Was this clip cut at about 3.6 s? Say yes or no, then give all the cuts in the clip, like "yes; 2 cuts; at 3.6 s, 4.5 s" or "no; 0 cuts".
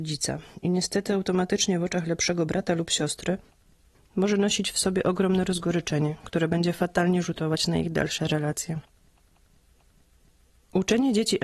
no; 0 cuts